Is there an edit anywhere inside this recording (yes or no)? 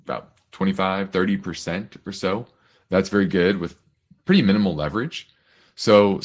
no